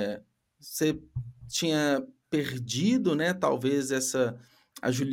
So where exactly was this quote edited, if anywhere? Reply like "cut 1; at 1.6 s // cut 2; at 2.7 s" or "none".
none